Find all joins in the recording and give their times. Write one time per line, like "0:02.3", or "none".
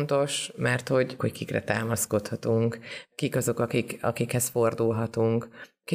0:01.2